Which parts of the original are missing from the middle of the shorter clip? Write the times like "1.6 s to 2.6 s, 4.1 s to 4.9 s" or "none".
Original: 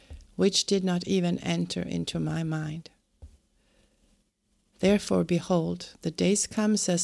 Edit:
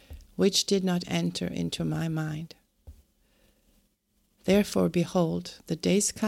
1.0 s to 1.4 s

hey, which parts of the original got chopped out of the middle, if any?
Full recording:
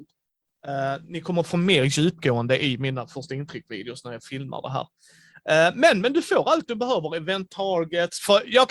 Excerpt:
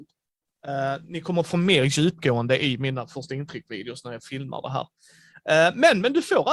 none

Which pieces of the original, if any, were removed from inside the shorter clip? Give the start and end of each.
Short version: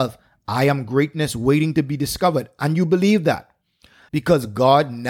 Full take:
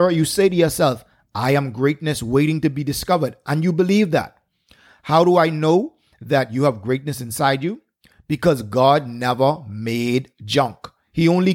4.9 s to 8.2 s

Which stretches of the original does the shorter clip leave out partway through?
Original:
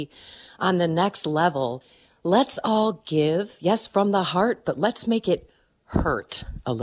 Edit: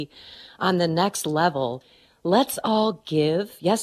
none

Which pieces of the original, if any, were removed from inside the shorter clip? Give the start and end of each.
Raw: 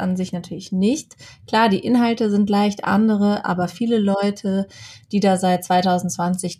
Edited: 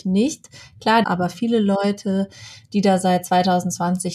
1.7 s to 3.4 s

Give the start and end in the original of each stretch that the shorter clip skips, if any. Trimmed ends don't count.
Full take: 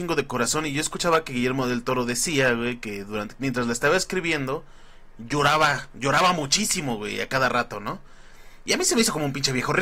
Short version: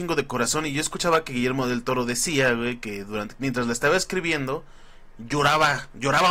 none

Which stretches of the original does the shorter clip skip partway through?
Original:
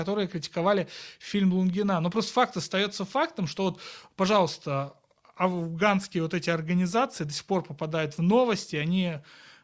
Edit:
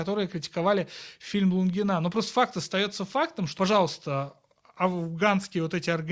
3.6 s to 4.2 s

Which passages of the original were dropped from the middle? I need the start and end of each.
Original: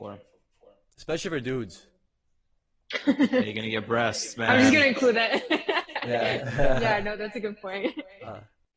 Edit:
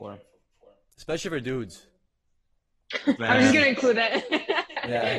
3.2 s to 4.4 s

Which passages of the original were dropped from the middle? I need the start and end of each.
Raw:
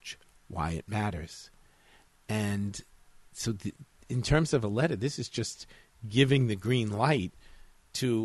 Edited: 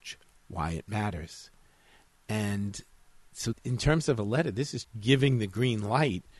3.5 s to 4.0 s, 5.3 s to 5.9 s

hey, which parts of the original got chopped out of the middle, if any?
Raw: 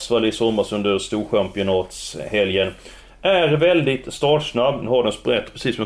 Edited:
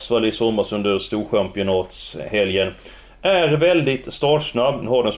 none

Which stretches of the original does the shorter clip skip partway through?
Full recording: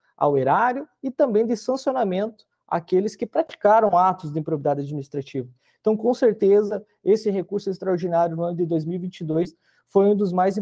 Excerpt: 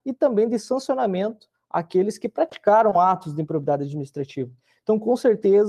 none

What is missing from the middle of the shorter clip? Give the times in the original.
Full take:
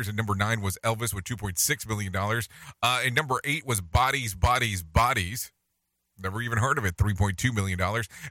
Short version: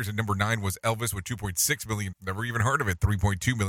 2.1 s to 6.1 s

